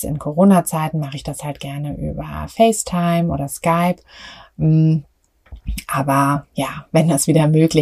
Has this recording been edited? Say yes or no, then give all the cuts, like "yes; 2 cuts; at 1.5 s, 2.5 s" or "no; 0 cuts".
no; 0 cuts